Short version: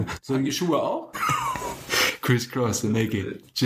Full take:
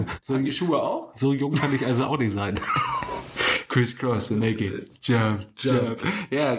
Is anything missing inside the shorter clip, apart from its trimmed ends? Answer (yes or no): yes